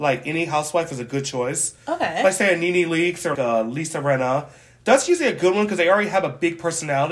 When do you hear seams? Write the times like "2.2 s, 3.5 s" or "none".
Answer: 3.3 s